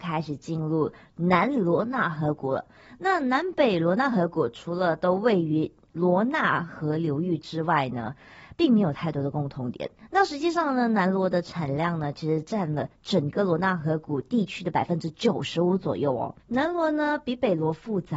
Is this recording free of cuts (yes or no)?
no